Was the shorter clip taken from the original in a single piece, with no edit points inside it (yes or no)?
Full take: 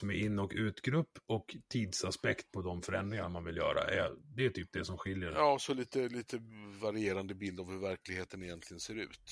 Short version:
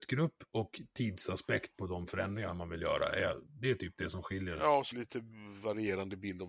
no